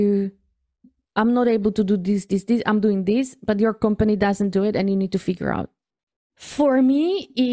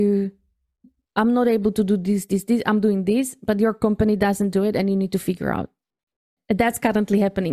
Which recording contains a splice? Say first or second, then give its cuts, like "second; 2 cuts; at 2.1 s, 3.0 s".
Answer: first; 1 cut; at 6.3 s